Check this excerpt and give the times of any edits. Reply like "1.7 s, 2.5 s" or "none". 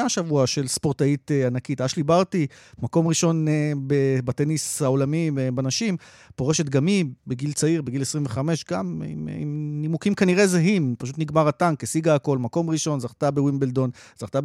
none